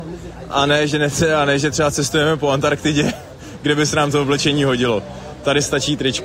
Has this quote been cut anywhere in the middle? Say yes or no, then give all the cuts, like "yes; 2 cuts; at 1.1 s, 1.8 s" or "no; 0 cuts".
no; 0 cuts